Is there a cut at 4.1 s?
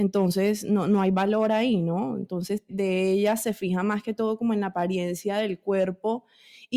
no; 1 cut; at 2.7 s

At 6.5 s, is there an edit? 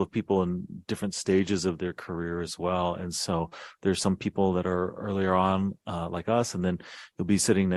no; 0 cuts

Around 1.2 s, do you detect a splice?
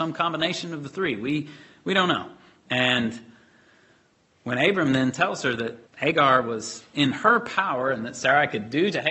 no; 2 cuts; at 2.6 s, 5.9 s

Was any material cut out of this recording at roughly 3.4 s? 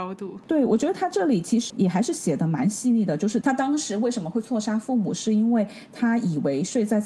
yes; 2 cuts; at 1.7 s, 3.4 s

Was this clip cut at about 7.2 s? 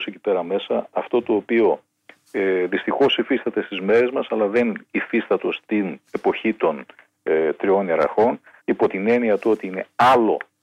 no; 1 cut; at 8.6 s

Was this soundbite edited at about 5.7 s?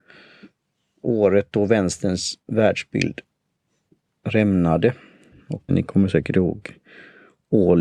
yes; 1 cut; at 5.7 s

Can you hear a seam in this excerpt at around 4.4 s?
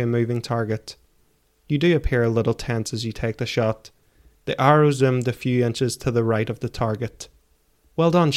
yes; 1 cut; at 4.4 s

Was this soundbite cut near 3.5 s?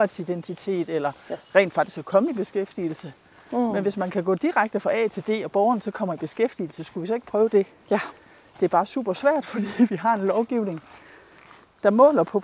yes; 1 cut; at 3.5 s

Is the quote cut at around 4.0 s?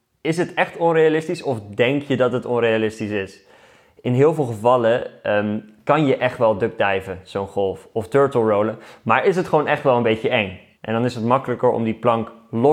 no; 1 cut; at 10.7 s

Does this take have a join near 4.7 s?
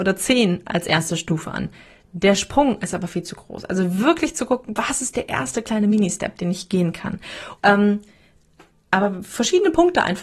no; 1 cut; at 7.6 s

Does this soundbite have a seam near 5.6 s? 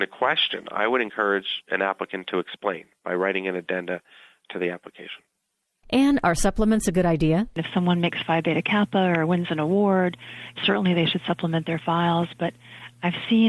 no; 1 cut; at 10.6 s

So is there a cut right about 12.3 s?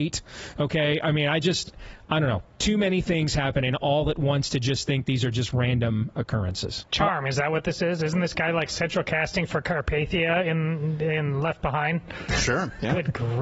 no; 1 cut; at 6.9 s

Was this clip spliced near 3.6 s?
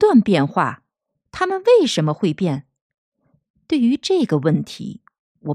no; 1 cut; at 1.1 s

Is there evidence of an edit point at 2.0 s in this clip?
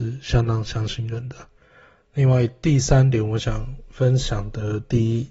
no; 0 cuts

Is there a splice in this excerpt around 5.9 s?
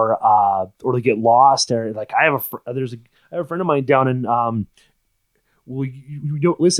no; 0 cuts

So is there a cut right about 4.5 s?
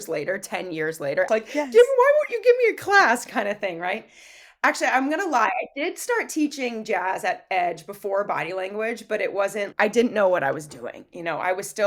no; 2 cuts; at 1.3 s, 9.7 s

